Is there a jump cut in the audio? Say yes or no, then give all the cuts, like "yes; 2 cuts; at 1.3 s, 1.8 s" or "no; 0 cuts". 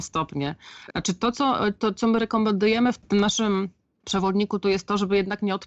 yes; 1 cut; at 0.9 s